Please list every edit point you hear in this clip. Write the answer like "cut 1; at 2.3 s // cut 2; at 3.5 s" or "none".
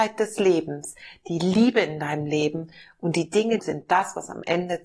cut 1; at 3.6 s